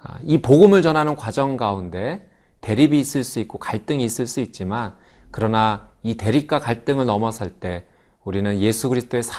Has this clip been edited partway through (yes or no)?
no